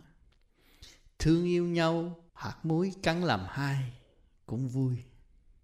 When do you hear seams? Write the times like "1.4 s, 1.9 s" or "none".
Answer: 2.3 s